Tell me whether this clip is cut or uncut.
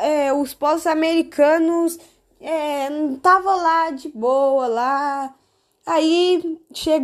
uncut